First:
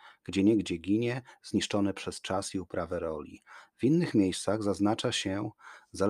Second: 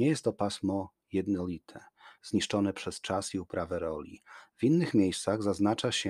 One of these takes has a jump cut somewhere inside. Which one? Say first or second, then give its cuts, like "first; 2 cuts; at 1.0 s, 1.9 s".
second; 1 cut; at 2.2 s